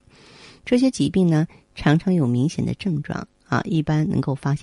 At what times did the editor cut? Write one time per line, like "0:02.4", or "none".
none